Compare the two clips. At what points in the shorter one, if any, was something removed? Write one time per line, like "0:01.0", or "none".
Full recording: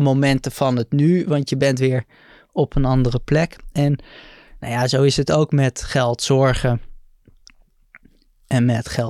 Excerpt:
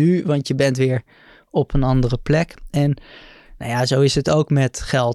none